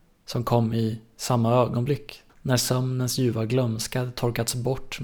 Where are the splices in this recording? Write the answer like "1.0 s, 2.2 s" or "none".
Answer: 2.3 s